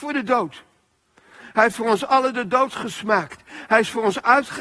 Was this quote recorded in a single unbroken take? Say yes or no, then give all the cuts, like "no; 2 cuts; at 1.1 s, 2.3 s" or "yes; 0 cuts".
yes; 0 cuts